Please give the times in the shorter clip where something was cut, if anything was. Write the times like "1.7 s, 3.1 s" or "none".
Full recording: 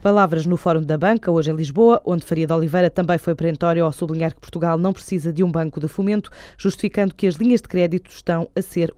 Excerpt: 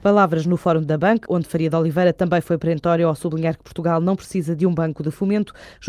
1.2 s